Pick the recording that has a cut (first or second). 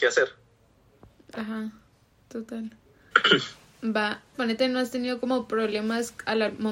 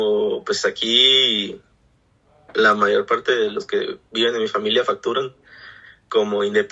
first